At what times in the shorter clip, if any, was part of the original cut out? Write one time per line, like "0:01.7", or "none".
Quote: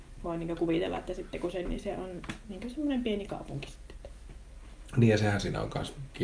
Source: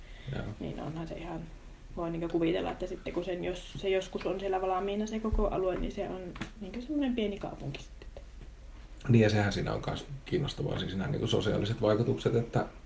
0:01.6